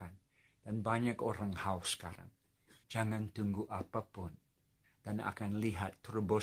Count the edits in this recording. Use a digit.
2